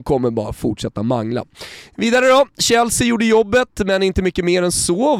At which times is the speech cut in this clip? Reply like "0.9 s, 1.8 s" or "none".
none

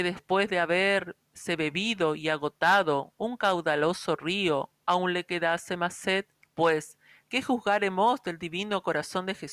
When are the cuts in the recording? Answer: 6.4 s

